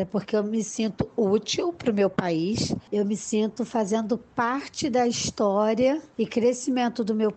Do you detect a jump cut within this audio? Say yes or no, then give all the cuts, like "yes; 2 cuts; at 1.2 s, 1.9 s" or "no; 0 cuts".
no; 0 cuts